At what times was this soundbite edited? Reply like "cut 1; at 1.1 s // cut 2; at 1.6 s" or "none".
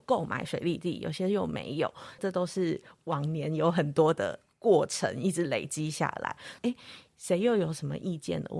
cut 1; at 2.2 s // cut 2; at 6.6 s